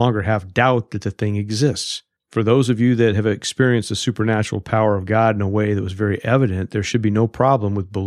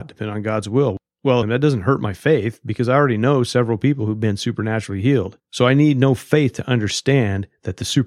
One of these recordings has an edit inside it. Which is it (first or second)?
second